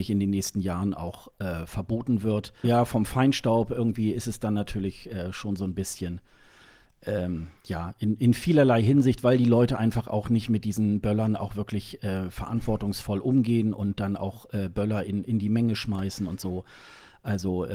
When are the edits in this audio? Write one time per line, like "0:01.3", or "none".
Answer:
0:02.6